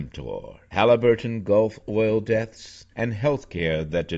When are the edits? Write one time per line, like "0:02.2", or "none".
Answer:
0:02.9